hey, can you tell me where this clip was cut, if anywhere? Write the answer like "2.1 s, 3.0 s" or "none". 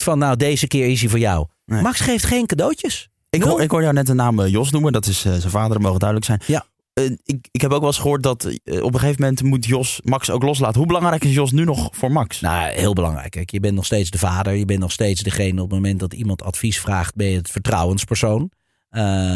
none